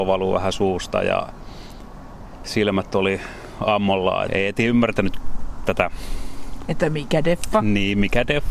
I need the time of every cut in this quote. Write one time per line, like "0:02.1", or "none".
0:04.3